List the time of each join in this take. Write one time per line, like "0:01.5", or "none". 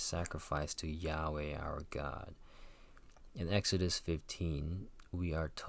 none